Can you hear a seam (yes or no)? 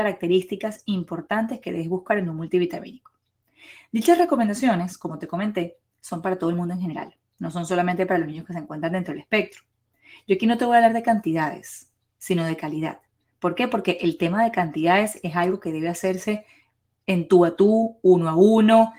no